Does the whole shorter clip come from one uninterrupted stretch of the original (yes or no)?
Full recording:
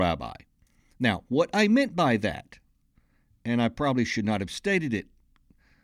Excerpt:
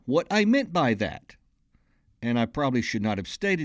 yes